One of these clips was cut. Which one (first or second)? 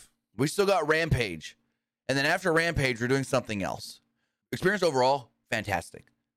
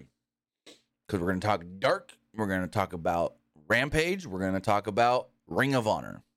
first